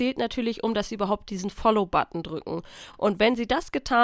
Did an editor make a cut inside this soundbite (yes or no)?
no